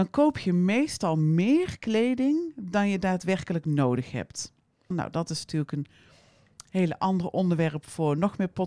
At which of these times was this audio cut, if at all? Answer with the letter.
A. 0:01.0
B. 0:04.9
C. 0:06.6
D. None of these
B